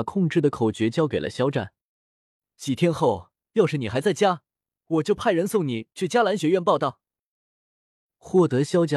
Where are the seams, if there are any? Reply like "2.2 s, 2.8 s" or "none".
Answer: none